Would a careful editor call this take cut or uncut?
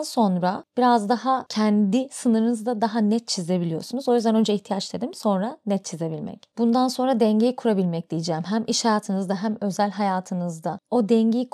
uncut